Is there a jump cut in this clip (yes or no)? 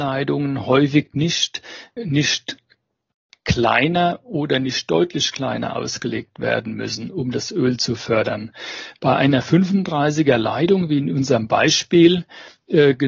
yes